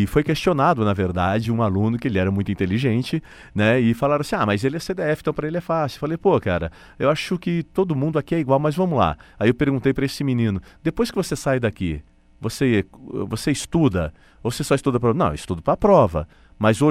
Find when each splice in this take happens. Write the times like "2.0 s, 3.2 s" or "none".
none